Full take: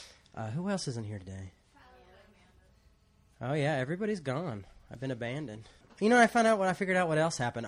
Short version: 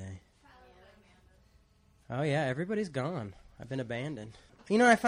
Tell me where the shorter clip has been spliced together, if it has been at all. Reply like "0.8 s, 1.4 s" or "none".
none